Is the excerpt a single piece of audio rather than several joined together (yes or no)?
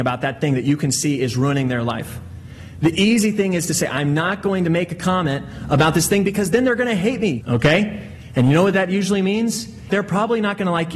no